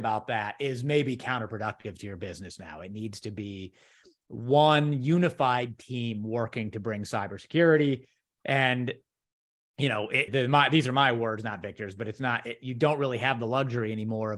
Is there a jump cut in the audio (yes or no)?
yes